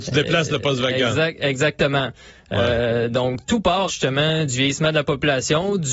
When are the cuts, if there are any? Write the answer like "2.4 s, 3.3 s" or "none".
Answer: 3.9 s